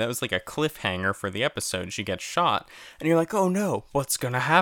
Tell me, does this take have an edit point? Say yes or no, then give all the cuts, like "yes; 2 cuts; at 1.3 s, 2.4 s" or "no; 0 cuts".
no; 0 cuts